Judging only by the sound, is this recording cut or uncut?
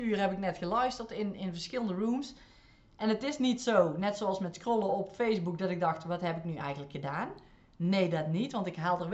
uncut